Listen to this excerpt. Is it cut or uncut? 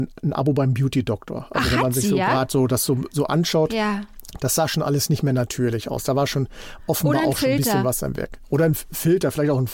uncut